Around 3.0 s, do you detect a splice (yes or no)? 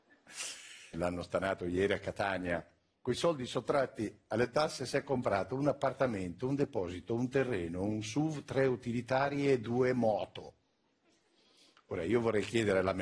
no